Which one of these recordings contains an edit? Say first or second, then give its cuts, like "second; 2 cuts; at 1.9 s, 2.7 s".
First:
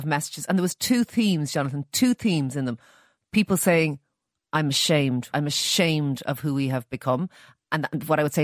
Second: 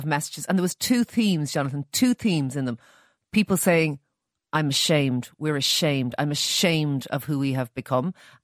first; 1 cut; at 5.3 s